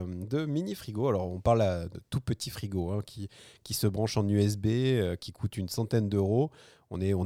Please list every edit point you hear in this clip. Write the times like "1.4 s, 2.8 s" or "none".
none